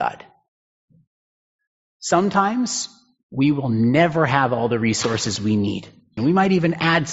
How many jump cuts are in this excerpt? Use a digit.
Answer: 1